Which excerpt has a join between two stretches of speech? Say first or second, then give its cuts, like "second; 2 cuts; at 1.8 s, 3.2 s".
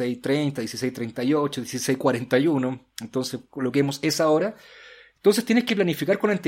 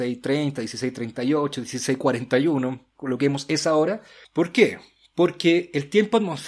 second; 2 cuts; at 2.9 s, 4.2 s